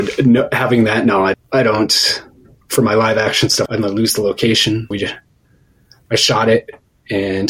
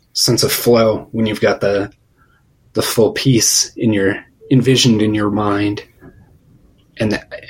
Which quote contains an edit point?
first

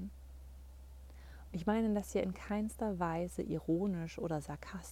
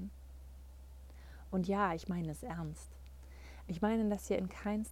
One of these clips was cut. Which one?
first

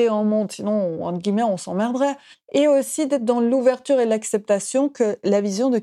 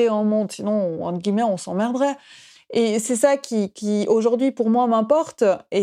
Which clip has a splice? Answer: first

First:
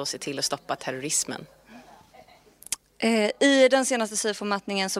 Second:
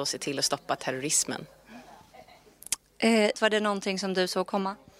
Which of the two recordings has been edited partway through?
second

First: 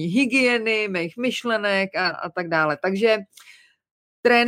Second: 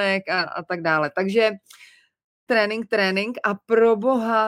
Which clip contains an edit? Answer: second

